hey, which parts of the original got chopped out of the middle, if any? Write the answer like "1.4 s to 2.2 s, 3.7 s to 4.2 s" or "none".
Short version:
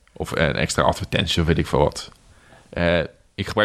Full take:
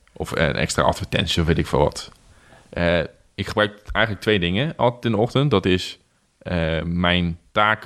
none

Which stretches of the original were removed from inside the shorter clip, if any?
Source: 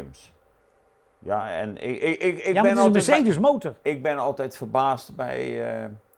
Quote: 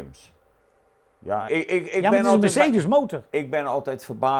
1.5 s to 2.0 s

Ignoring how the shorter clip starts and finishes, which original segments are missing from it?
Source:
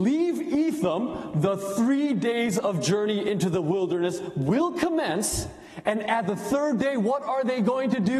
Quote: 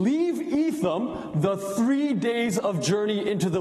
none

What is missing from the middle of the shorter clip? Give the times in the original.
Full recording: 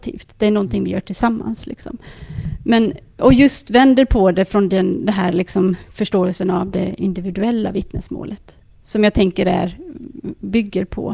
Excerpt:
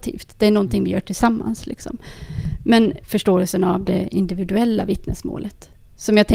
3.0 s to 5.9 s

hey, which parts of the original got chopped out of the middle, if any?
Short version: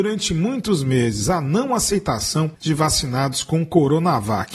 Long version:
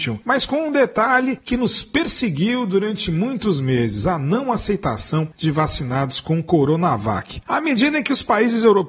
none

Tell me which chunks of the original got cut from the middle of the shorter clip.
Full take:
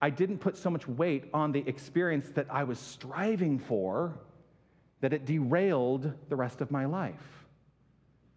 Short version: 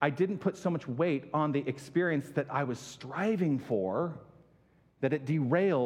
none

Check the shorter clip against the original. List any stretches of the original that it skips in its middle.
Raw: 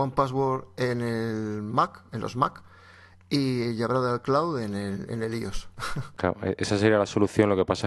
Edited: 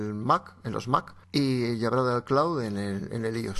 2.7 s to 3.2 s

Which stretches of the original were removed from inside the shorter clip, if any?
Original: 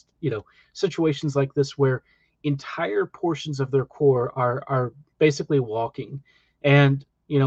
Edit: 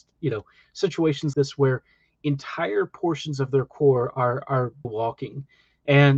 1.3 s to 1.5 s, 5.0 s to 5.6 s

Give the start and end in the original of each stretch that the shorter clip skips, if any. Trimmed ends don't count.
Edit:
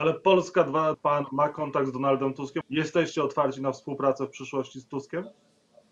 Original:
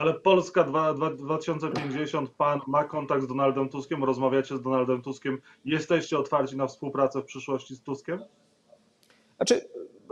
0.9 s to 2.3 s, 4.0 s to 5.6 s

